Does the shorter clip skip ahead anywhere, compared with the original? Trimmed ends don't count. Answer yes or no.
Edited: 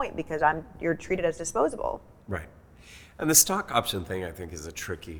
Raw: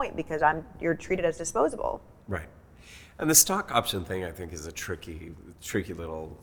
no